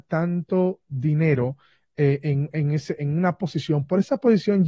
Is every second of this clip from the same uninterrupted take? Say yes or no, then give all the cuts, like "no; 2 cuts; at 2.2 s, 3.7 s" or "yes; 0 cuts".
yes; 0 cuts